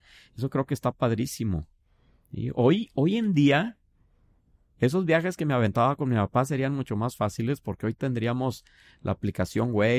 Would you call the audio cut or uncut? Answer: uncut